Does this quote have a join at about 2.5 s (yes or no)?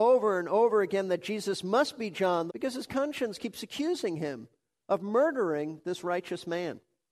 yes